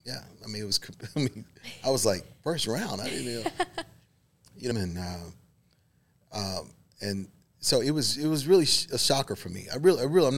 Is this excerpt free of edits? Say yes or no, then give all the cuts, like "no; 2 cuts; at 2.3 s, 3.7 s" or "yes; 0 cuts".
no; 1 cut; at 4.7 s